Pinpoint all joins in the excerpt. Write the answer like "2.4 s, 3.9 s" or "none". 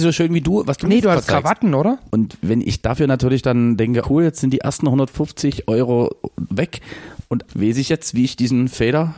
2.1 s, 4.0 s, 7.5 s